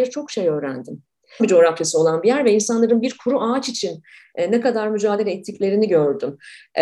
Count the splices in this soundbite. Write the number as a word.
one